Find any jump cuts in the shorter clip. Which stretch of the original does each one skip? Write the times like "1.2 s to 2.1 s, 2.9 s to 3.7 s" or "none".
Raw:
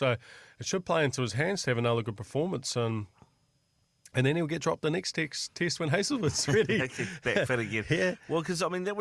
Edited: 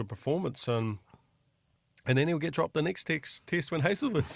none